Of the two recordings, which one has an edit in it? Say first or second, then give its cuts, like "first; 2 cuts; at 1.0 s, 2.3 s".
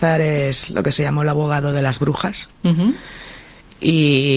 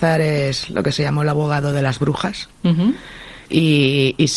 second; 1 cut; at 3.5 s